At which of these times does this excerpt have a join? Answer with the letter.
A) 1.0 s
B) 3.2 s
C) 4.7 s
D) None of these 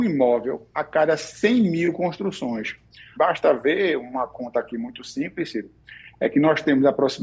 B